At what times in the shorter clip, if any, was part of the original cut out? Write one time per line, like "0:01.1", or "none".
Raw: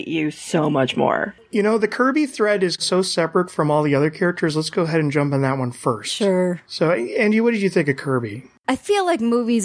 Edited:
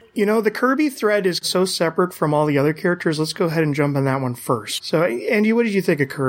0:04.8